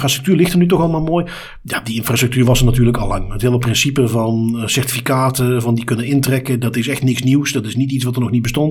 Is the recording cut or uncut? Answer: uncut